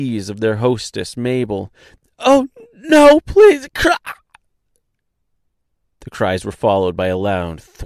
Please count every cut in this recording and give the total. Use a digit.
0